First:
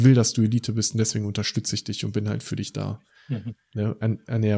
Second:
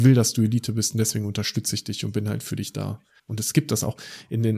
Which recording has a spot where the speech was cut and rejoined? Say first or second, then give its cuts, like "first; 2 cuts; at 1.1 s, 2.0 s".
second; 1 cut; at 3.2 s